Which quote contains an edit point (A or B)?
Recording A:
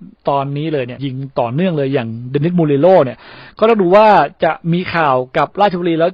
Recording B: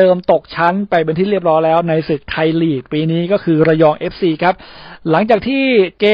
A